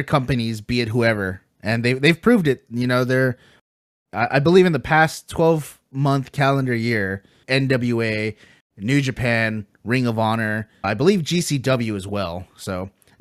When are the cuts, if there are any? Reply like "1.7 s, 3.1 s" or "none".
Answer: 7.4 s, 10.8 s